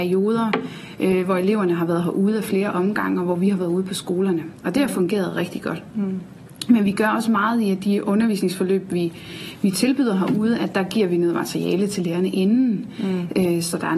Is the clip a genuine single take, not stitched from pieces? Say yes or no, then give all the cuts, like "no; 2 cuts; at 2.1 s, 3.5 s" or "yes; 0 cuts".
yes; 0 cuts